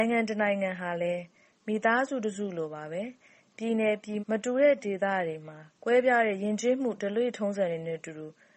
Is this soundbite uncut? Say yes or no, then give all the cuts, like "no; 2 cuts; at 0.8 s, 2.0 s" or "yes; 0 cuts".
no; 1 cut; at 4.2 s